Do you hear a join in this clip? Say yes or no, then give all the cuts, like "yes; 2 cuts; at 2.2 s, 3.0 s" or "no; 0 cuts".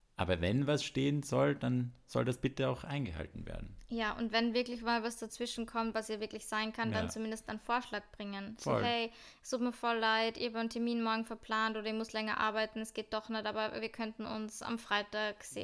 no; 0 cuts